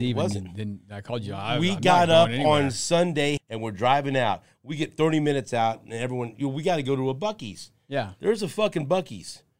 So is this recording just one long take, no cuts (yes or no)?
no